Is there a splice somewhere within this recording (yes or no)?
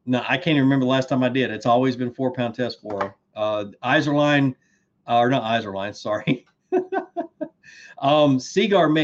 no